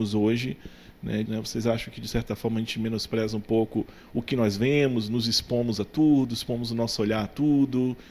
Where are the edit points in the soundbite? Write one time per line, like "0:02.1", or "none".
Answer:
0:01.3